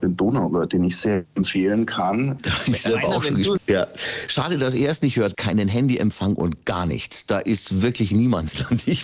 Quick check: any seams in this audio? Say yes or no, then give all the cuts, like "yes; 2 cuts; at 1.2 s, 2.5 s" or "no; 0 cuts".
yes; 3 cuts; at 2.4 s, 3.6 s, 5.3 s